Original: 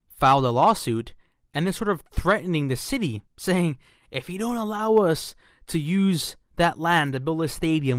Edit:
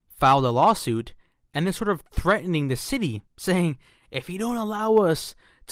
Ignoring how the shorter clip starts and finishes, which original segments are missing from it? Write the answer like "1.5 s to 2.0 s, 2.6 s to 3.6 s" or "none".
none